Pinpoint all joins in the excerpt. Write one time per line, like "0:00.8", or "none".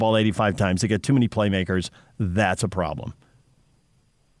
none